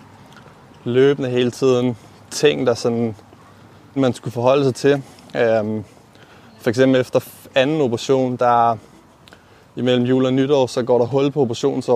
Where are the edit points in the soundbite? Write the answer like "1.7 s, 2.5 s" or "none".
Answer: 4.0 s